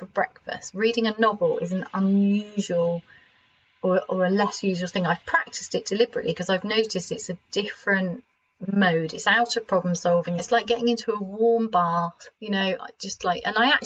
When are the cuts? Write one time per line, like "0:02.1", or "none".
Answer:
0:10.4
0:12.3